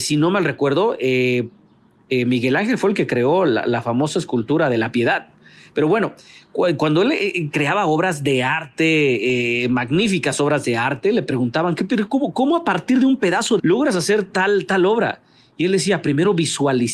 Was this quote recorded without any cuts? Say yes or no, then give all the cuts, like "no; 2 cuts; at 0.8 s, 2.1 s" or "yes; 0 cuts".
no; 1 cut; at 13.6 s